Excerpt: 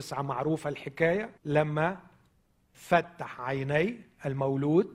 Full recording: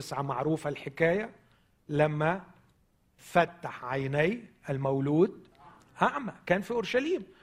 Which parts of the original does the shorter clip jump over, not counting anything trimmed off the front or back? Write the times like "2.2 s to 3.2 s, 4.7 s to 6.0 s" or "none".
1.4 s to 1.8 s